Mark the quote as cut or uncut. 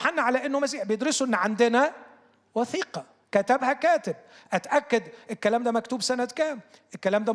uncut